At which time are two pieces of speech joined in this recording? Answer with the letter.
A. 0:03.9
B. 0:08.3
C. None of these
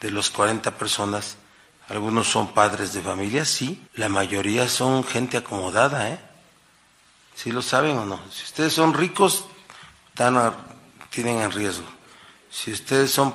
A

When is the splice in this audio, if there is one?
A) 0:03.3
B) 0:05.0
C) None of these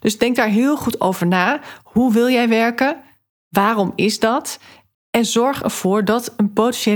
C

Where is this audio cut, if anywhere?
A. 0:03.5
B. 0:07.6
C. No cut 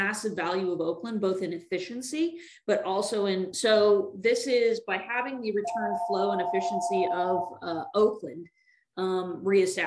A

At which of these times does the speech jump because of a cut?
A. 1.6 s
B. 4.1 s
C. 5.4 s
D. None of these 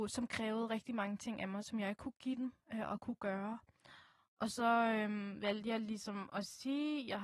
D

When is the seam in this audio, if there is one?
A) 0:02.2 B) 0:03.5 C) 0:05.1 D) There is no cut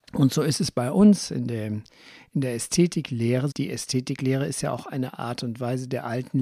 B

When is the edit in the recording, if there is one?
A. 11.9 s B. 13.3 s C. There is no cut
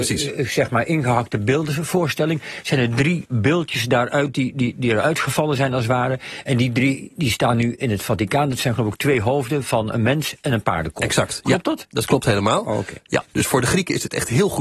B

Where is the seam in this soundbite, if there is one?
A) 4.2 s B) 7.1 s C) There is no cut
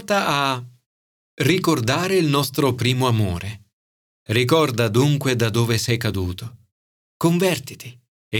C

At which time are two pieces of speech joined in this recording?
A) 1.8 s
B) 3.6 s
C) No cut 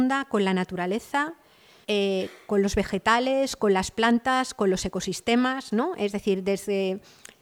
A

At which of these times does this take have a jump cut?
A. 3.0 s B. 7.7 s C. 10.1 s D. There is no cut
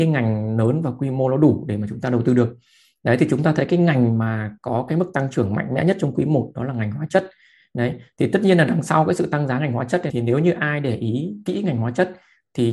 C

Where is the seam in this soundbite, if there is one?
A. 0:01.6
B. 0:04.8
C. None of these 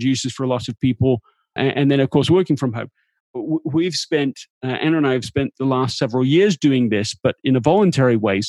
A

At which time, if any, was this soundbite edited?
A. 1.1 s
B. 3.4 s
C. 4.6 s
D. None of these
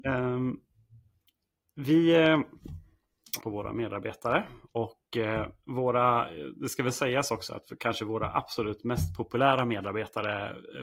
B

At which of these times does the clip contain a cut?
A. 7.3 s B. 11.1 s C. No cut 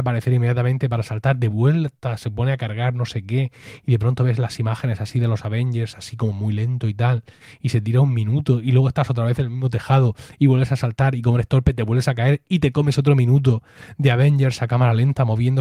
C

